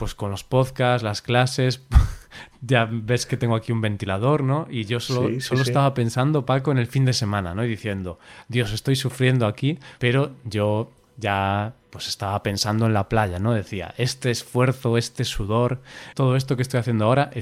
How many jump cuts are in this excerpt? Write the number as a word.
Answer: zero